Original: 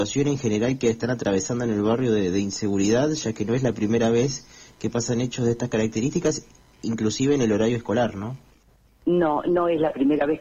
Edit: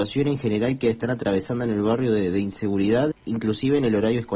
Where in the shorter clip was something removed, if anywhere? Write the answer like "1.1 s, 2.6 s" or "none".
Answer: 3.1 s